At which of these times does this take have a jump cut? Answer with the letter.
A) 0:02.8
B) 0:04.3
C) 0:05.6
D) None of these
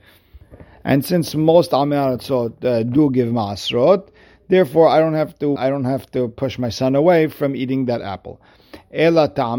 C